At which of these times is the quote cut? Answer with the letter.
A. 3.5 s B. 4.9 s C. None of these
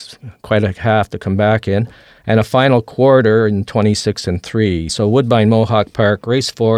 B